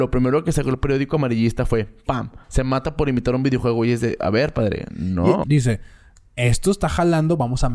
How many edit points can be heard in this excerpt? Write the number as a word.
two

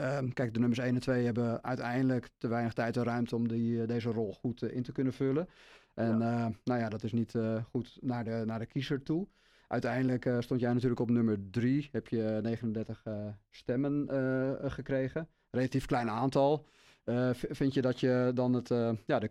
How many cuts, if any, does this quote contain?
zero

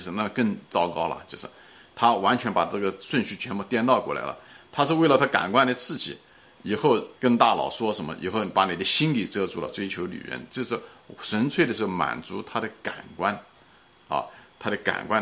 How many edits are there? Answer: two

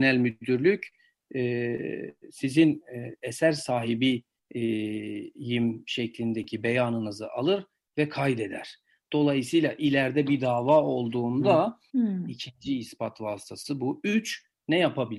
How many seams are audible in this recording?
one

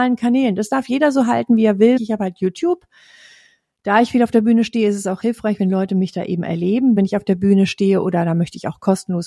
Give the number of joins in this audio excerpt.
two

